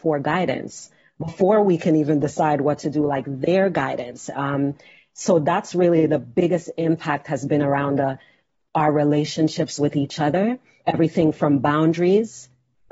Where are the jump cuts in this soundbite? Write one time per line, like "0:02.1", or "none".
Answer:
0:10.8